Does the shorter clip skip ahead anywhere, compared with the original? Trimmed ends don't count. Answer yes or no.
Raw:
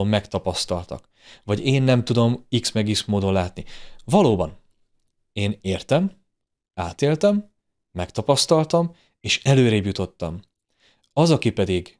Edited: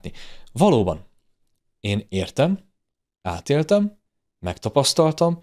no